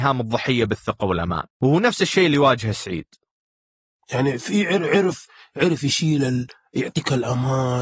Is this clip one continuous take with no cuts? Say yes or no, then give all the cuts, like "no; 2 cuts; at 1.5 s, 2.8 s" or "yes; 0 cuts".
no; 1 cut; at 1.5 s